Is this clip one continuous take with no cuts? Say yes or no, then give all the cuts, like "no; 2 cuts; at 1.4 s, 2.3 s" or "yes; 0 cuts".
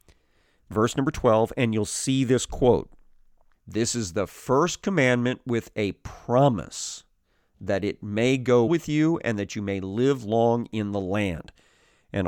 no; 2 cuts; at 3.5 s, 8.7 s